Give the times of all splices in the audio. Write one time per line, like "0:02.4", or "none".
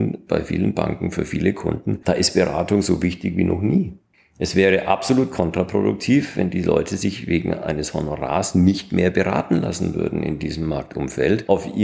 none